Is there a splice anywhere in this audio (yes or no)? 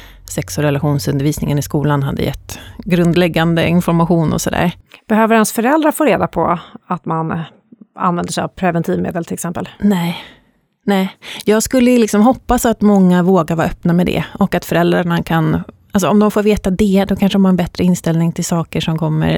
no